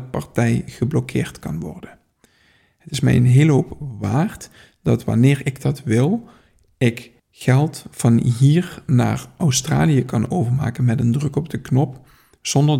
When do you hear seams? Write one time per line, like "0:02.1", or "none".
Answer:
0:07.2